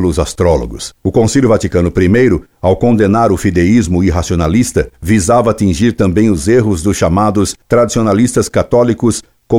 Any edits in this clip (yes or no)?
no